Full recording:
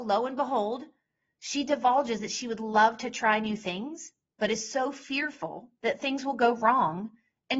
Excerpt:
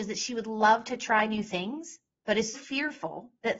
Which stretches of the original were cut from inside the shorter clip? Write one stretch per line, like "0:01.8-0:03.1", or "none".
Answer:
0:04.7-0:04.9